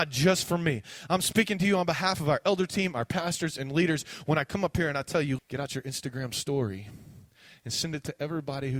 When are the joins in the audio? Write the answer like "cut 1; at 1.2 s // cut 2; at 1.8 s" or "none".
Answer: cut 1; at 5.4 s